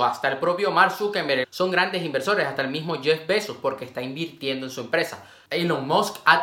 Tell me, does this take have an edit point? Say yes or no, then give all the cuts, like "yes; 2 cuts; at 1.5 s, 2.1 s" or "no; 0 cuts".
yes; 1 cut; at 1.4 s